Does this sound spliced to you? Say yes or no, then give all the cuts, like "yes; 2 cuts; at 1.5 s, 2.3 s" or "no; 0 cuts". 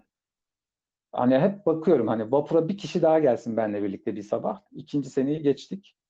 yes; 1 cut; at 4.7 s